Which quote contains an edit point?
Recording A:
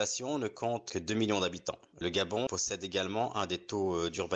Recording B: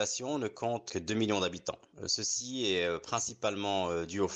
A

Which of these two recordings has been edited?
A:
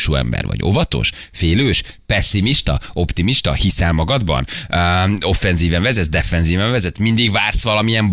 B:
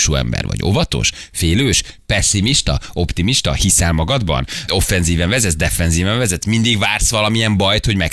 B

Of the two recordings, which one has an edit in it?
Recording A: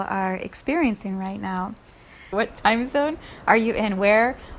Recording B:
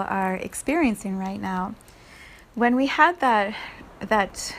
A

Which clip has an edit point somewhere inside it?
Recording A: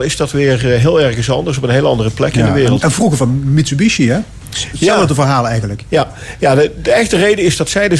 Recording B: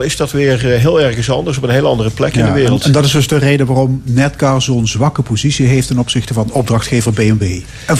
A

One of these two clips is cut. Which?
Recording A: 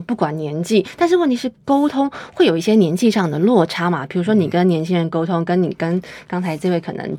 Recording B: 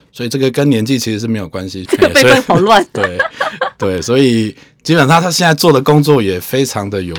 B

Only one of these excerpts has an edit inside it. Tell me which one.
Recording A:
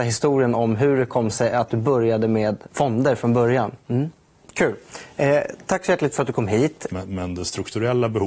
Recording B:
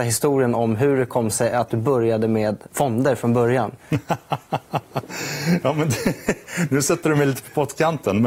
A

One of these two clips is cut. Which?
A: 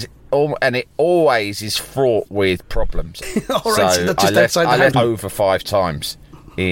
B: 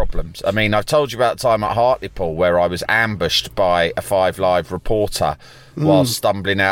A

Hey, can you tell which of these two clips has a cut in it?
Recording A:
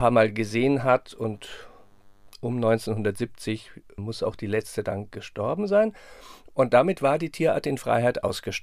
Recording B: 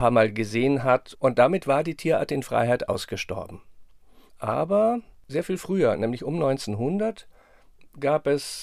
B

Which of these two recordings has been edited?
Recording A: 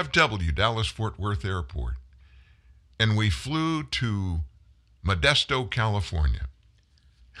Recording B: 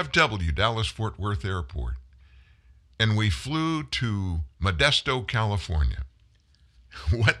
B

